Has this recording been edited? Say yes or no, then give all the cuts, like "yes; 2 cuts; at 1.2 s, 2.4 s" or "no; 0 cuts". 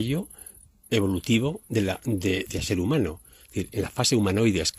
yes; 1 cut; at 2.5 s